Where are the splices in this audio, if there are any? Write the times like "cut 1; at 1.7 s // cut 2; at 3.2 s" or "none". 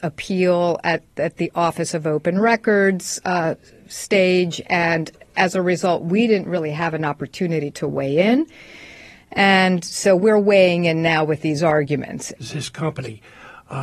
cut 1; at 12.4 s